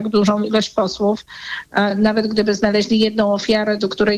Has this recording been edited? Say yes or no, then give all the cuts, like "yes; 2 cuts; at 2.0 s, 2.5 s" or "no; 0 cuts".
no; 0 cuts